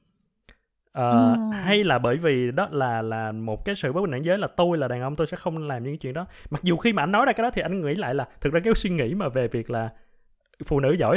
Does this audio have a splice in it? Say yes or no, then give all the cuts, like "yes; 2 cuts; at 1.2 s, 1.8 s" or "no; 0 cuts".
no; 0 cuts